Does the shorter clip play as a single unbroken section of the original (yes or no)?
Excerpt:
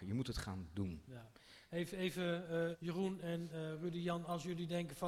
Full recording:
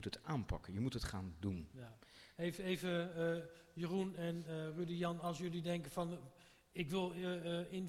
no